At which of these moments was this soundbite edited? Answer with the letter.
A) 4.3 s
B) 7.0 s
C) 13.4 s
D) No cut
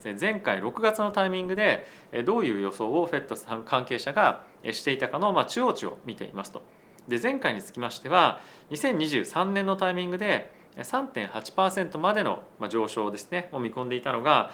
D